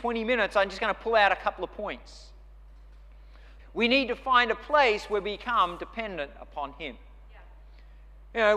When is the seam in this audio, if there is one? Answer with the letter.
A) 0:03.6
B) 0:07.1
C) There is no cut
A